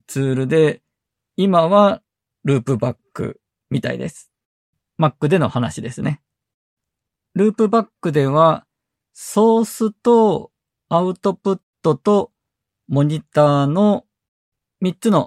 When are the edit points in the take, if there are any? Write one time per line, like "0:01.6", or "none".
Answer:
none

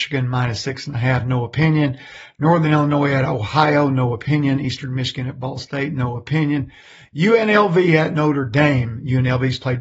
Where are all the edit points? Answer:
none

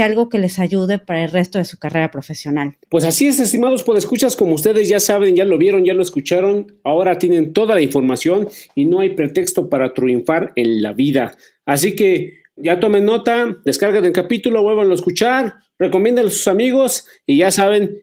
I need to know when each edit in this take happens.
0:02.8

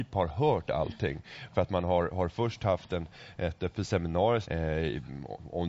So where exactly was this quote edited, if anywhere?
0:04.4

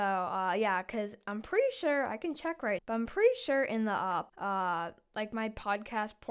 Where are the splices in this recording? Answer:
0:02.8
0:04.3

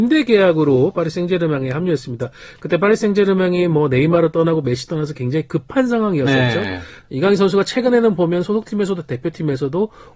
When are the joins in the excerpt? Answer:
0:07.0

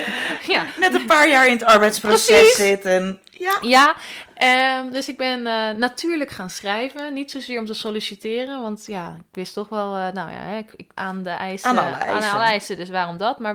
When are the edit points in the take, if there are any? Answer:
0:11.0

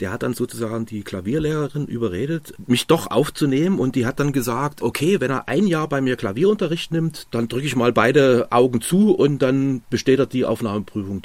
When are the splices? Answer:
none

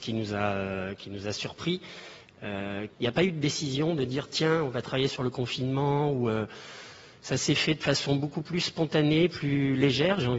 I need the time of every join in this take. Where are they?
0:02.9

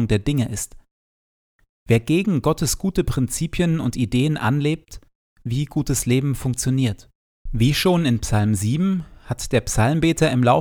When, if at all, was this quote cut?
0:05.3
0:07.5

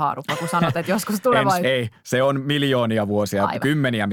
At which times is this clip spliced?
0:01.6

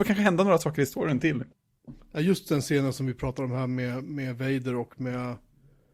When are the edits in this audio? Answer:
0:02.5

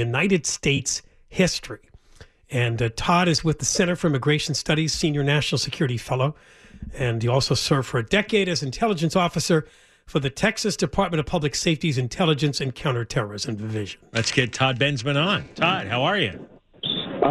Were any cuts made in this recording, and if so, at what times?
none

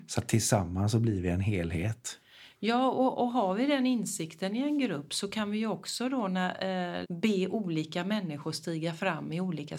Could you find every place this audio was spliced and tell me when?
0:07.0

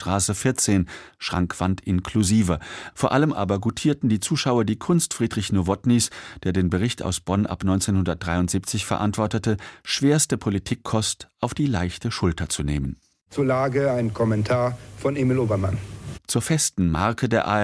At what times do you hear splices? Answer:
0:02.9
0:16.1

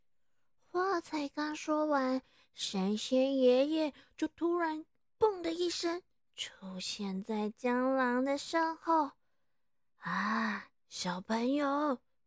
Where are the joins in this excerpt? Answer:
none

